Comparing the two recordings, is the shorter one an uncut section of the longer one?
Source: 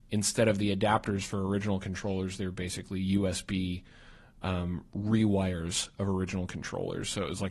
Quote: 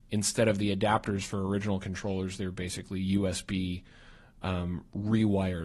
yes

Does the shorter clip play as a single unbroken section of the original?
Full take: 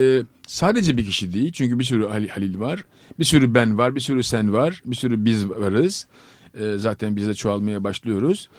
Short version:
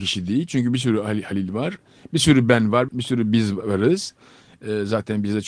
no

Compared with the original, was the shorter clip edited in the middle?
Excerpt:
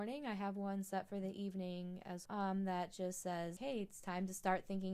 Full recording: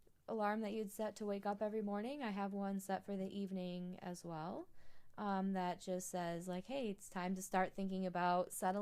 yes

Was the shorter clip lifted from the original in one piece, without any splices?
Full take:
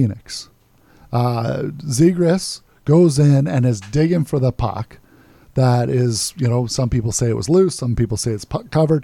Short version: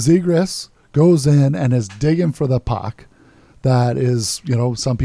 yes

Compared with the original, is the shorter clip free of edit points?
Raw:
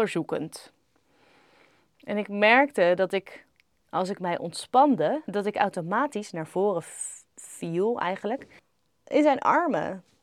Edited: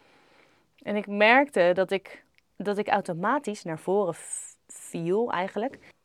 no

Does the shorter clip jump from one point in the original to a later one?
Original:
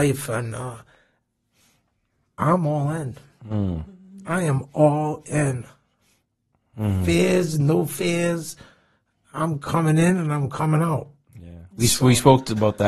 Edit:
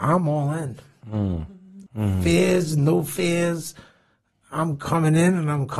yes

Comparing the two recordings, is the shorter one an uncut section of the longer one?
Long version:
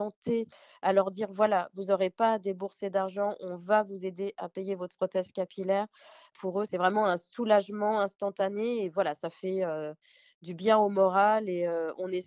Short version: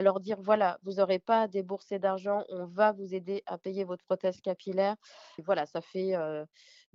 no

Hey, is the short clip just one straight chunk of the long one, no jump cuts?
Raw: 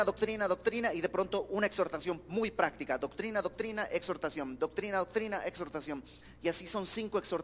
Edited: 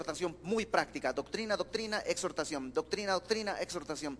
yes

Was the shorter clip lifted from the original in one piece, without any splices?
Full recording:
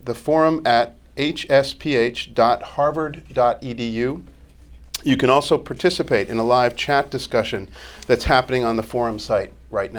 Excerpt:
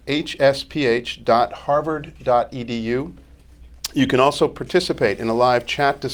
yes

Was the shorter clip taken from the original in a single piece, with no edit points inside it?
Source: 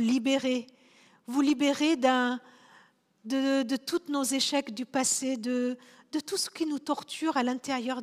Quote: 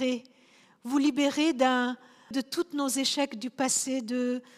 no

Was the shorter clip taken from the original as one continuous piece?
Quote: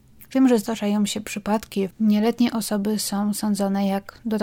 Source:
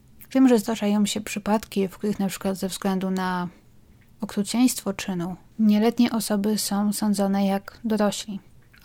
no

